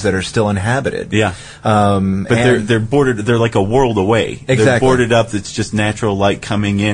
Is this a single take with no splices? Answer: yes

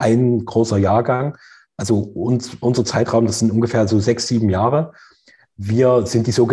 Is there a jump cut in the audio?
no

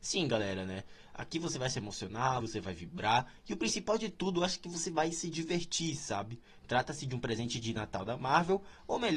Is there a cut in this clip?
yes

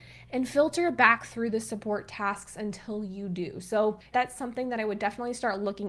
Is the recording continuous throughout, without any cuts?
no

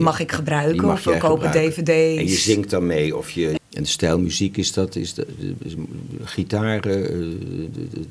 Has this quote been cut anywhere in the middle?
yes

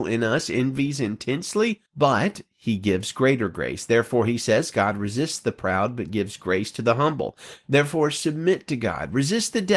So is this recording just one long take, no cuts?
no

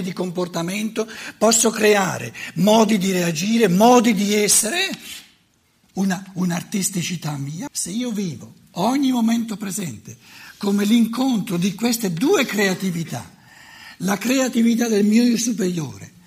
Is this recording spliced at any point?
yes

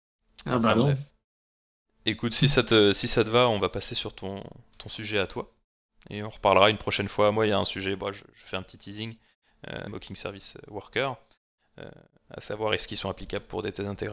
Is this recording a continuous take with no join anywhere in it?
no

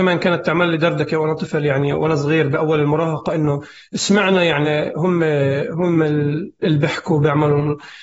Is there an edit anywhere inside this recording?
yes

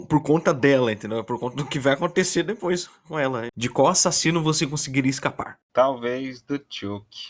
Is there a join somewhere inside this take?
yes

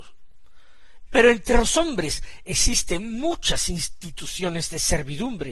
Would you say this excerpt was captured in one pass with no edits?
no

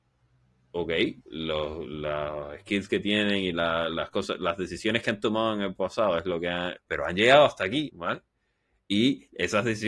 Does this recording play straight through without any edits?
no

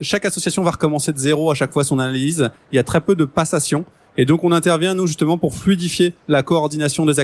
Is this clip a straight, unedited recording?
yes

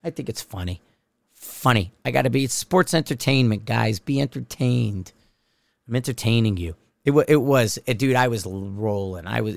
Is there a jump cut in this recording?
no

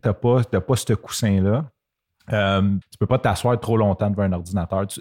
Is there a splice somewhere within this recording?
yes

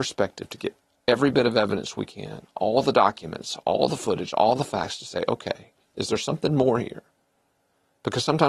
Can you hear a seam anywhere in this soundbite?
no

